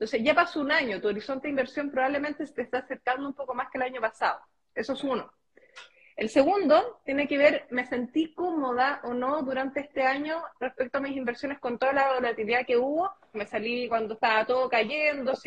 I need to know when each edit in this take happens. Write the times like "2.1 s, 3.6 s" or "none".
13.3 s